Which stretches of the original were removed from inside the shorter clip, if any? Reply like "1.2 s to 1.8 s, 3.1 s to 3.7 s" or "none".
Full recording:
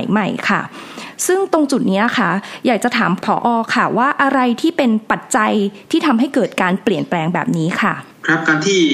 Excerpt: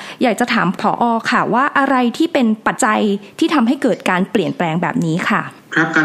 5.2 s to 5.3 s